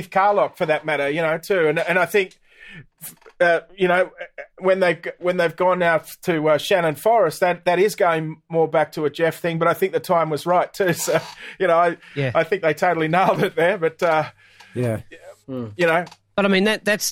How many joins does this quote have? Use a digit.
1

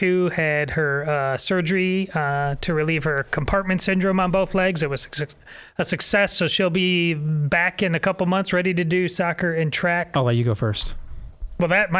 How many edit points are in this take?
1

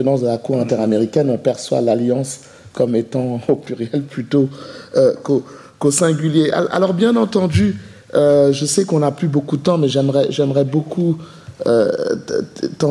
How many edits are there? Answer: 0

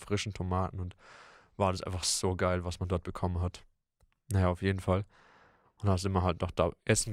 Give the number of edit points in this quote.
1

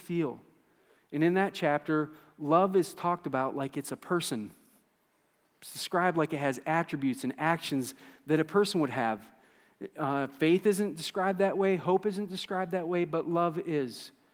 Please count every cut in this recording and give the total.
1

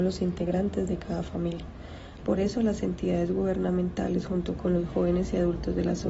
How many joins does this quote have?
1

